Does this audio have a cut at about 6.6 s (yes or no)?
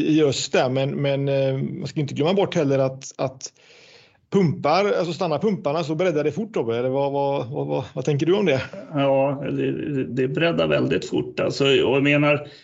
no